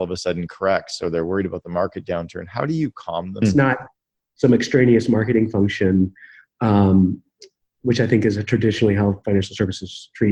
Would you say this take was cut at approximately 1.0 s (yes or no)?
no